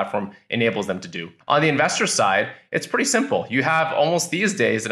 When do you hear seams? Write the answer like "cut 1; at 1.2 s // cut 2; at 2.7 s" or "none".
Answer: cut 1; at 1.4 s